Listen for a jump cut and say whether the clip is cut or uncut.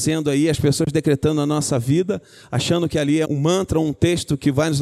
cut